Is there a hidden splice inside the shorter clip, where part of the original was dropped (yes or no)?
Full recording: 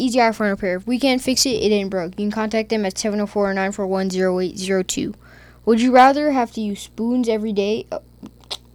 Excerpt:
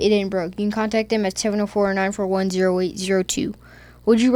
no